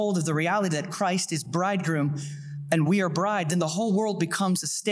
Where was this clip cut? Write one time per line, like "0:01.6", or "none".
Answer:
none